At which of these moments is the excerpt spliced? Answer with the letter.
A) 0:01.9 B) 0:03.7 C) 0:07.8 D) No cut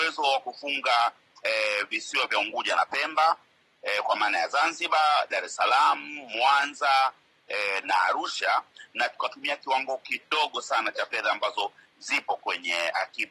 C